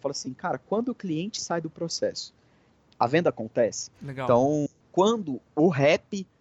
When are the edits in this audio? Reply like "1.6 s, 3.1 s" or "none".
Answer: 3.9 s

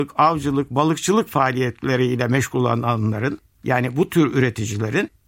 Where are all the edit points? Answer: none

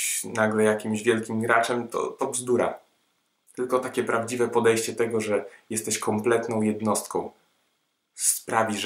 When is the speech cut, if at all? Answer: none

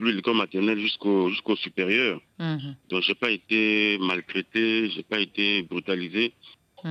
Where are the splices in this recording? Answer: none

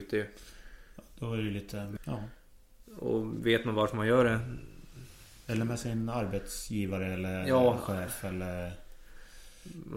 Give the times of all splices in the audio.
2.0 s

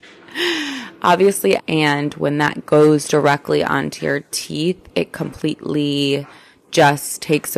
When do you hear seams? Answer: 1.6 s

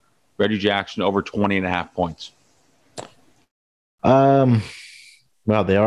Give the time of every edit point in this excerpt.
none

